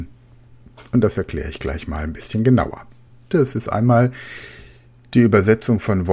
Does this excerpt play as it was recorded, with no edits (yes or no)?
no